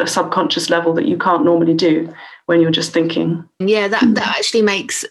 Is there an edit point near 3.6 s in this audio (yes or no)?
yes